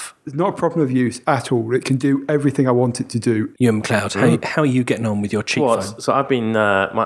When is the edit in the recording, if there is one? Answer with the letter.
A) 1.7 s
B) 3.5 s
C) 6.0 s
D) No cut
B